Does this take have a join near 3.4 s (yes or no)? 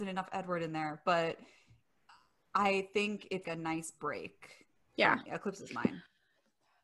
yes